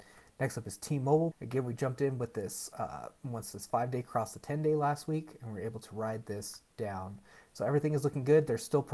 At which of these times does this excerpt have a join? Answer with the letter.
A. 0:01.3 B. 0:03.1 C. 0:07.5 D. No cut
A